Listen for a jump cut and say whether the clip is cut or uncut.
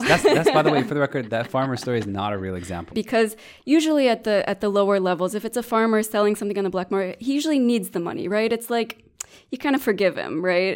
cut